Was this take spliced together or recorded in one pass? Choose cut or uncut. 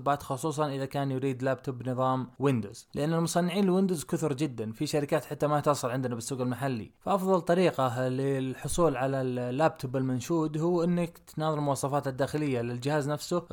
uncut